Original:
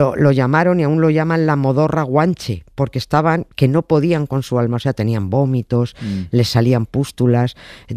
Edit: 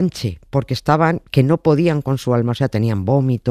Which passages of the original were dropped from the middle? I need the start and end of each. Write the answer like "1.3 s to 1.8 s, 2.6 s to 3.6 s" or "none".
none